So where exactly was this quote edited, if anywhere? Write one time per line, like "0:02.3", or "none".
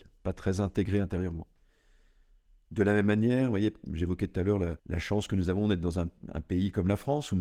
0:04.8